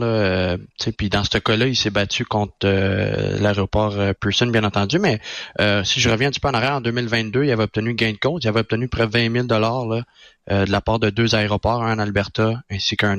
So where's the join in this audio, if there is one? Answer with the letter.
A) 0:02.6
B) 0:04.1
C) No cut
C